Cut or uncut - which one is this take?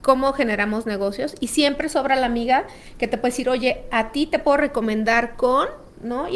uncut